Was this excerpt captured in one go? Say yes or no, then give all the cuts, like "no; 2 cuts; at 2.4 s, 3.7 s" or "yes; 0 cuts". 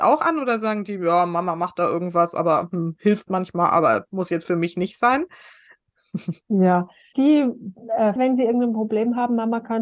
no; 2 cuts; at 7.1 s, 8.2 s